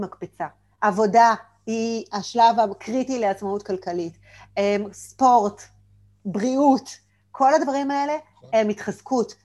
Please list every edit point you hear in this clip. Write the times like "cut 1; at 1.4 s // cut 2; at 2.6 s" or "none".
none

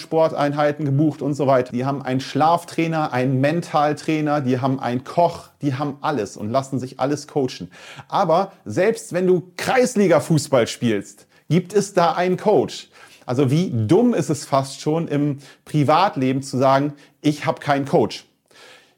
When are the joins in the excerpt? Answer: cut 1; at 1.7 s

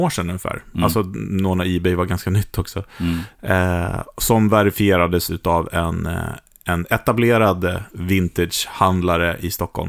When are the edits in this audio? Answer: none

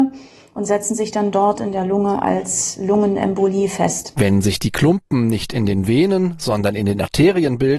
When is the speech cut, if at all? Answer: cut 1; at 4.1 s

